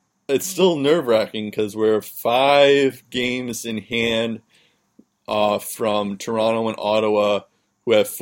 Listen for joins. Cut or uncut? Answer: uncut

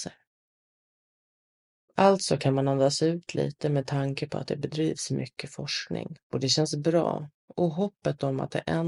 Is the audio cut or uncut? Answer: cut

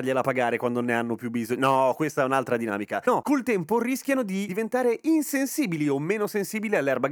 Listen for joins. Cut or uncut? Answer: uncut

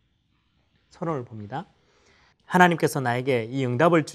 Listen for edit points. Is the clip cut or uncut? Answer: cut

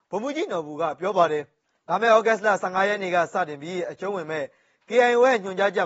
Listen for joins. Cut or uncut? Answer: uncut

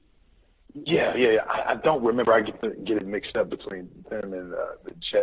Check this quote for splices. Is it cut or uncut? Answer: uncut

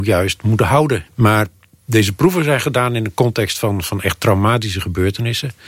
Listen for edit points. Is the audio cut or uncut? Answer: cut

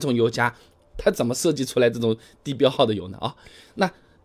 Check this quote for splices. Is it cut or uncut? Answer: uncut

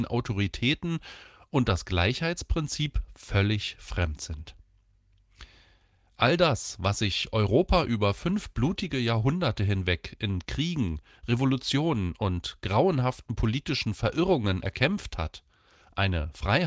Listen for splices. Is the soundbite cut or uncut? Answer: uncut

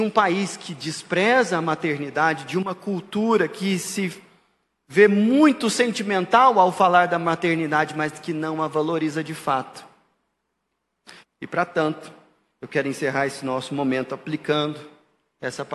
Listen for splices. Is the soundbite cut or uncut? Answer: cut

